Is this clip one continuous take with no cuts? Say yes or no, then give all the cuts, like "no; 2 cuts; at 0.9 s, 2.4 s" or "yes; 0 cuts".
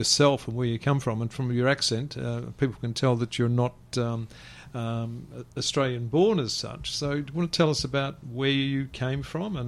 yes; 0 cuts